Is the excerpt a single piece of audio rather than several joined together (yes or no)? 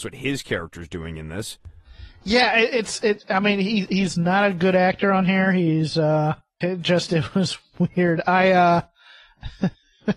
no